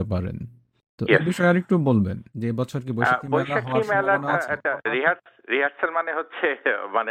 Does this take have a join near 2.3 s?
yes; 1 cut; at 2.3 s

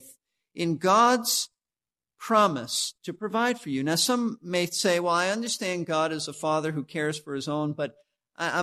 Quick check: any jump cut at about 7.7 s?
no; 1 cut; at 3.0 s

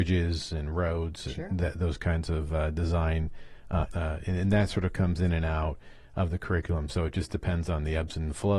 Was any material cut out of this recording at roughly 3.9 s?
yes; 1 cut; at 3.9 s

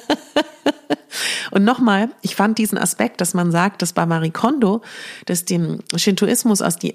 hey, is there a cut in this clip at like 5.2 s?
no; 0 cuts

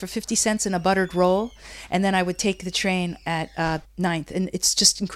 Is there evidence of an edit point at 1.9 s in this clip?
no; 1 cut; at 3.8 s

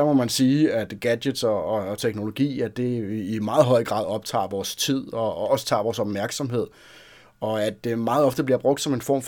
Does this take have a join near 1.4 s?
no; 0 cuts

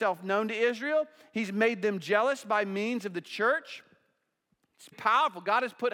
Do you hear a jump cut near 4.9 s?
yes; 1 cut; at 4.9 s

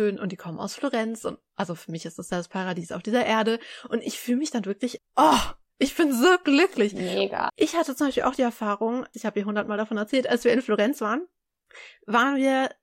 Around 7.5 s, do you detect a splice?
yes; 3 cuts; at 5.0 s, 7.5 s, 9.1 s

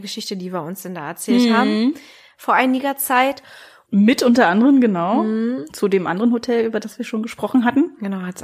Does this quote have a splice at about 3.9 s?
yes; 1 cut; at 3.9 s

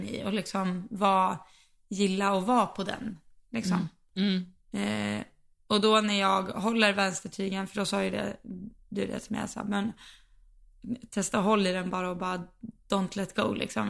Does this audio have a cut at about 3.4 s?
no; 0 cuts

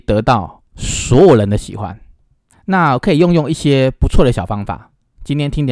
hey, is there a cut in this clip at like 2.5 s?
yes; 1 cut; at 2.5 s

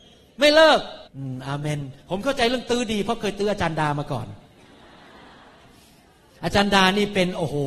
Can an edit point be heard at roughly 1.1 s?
yes; 1 cut; at 1.1 s

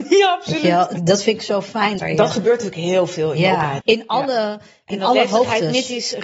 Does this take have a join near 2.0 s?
yes; 3 cuts; at 1.0 s, 2.0 s, 3.8 s

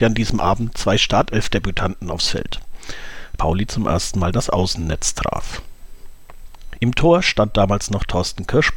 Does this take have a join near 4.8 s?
no; 2 cuts; at 3.4 s, 6.8 s

